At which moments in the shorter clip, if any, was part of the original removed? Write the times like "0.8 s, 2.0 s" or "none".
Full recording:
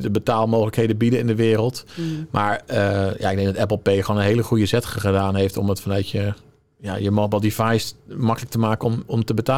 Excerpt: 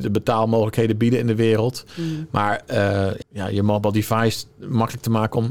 3.2 s